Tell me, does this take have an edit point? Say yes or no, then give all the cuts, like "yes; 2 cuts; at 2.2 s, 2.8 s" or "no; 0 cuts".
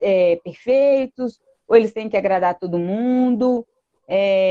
no; 0 cuts